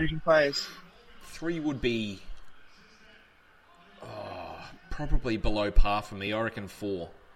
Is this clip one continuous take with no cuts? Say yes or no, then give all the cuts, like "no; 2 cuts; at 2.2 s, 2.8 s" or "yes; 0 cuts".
yes; 0 cuts